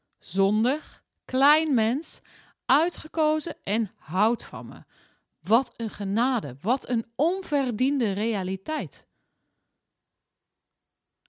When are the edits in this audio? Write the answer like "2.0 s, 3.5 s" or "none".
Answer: none